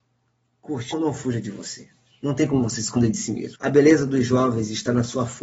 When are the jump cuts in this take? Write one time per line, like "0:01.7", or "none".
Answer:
0:00.9
0:03.6